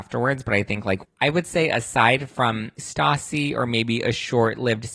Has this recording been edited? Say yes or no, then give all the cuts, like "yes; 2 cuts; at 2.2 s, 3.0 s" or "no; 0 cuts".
yes; 2 cuts; at 1.0 s, 2.8 s